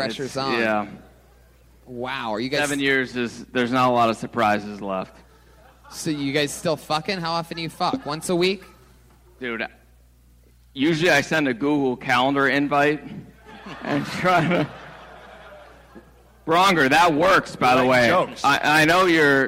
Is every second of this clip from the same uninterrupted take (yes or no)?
yes